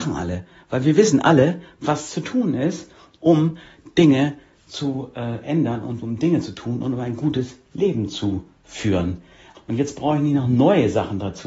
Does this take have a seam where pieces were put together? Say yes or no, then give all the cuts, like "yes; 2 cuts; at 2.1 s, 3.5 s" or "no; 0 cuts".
yes; 1 cut; at 9.5 s